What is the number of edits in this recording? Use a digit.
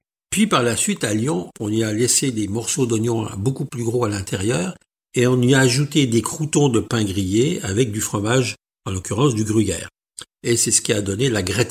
1